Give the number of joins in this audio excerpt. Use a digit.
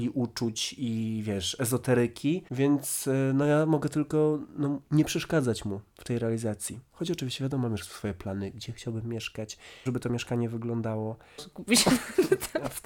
2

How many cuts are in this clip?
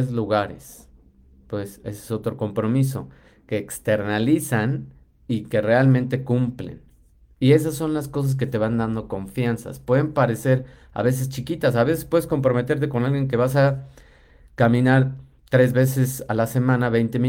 0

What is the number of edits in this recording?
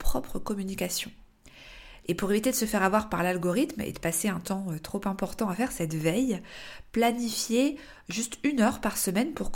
1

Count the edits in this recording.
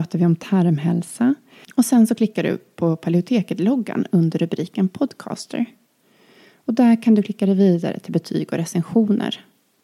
1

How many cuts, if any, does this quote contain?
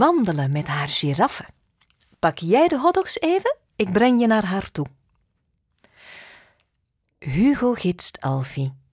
0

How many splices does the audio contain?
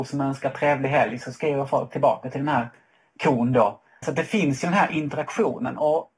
1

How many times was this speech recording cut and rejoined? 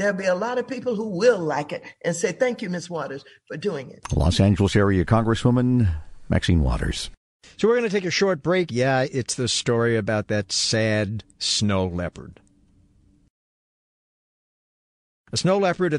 2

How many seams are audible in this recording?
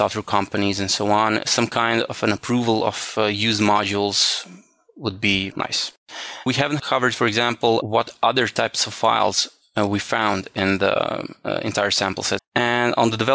1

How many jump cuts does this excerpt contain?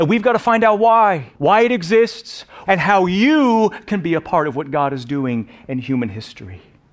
2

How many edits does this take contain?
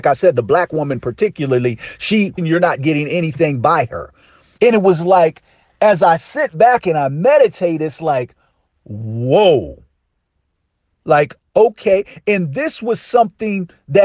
3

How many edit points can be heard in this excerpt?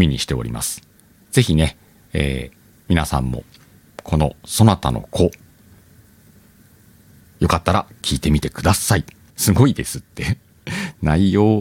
1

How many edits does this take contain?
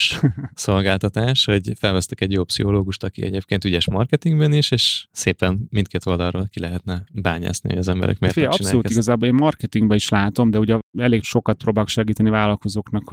0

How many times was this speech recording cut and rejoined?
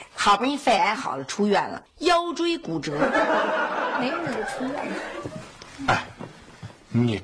1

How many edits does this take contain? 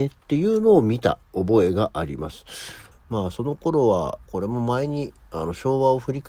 2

